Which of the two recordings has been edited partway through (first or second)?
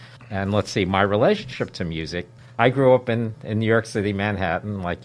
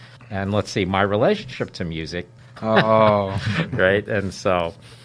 second